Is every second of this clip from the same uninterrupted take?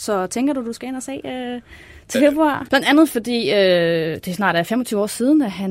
no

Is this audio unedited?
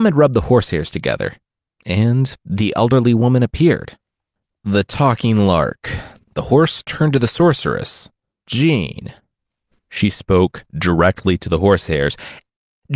no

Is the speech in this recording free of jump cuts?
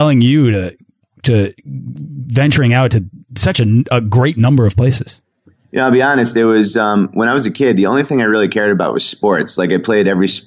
yes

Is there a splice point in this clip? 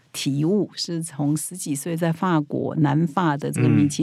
no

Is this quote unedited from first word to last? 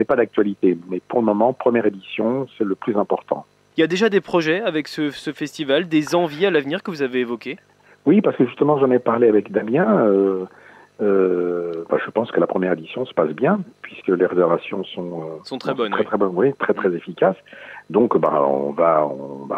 no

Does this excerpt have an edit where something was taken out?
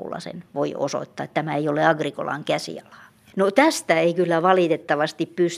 yes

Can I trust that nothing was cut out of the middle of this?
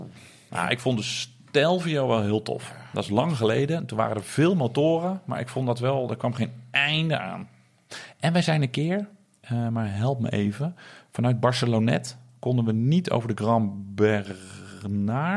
yes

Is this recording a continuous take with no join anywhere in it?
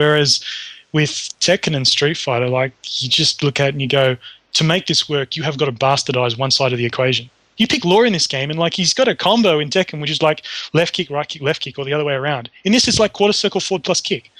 no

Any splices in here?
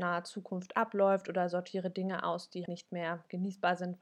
yes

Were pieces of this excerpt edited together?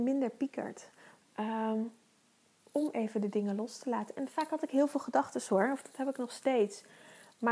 yes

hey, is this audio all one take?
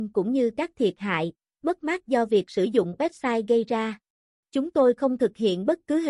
no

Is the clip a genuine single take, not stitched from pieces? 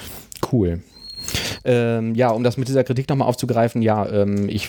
yes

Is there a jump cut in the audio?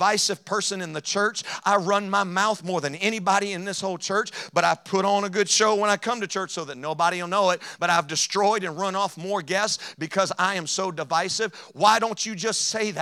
no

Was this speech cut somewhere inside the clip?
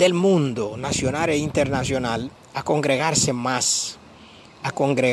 no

